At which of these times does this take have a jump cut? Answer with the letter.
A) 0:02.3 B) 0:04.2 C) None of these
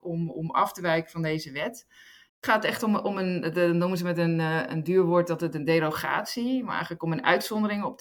A